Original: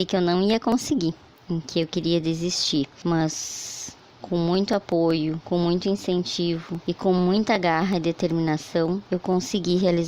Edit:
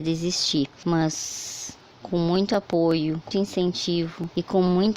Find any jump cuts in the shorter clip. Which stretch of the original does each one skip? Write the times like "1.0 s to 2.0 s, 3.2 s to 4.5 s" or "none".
5.5 s to 5.8 s